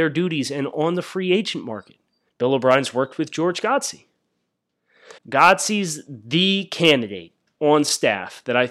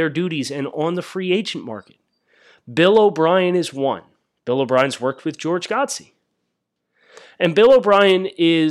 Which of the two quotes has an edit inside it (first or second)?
first